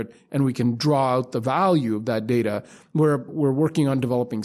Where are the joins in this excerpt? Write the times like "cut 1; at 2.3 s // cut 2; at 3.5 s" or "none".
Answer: cut 1; at 3.3 s